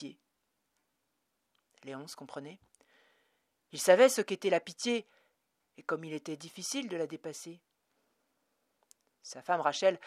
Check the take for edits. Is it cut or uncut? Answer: uncut